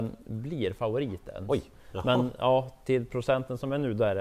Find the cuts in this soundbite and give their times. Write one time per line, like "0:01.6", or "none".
none

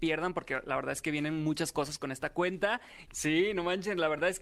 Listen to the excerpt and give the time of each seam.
0:03.1

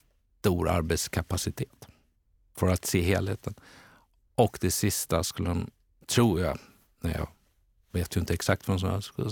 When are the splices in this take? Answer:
none

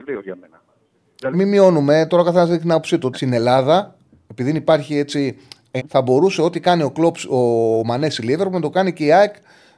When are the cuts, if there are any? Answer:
0:01.3
0:03.1
0:05.8

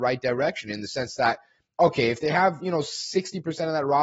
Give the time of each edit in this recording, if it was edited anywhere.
none

